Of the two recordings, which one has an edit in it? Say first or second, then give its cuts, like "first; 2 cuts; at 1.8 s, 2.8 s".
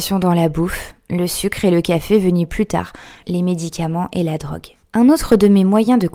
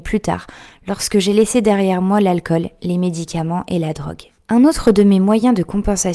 first; 1 cut; at 3.2 s